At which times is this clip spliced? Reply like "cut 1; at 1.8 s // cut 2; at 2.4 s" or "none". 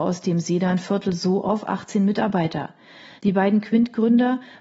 cut 1; at 3.2 s